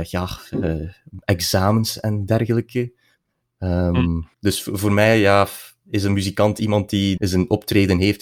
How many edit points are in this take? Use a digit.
2